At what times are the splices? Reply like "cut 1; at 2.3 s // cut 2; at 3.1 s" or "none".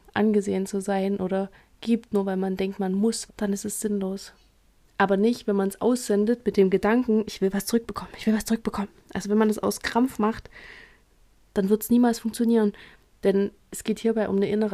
cut 1; at 3.3 s // cut 2; at 4.8 s